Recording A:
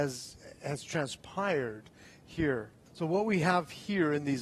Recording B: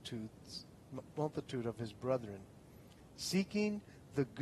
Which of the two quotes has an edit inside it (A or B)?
A